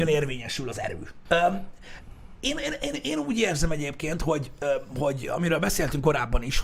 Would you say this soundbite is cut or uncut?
cut